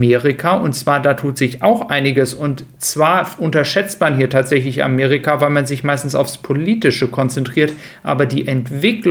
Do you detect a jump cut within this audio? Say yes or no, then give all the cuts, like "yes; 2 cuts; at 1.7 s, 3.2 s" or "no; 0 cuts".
no; 0 cuts